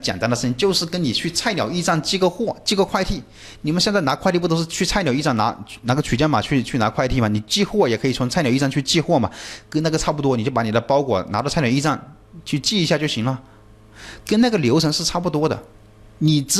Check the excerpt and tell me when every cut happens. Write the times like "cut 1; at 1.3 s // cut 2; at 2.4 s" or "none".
none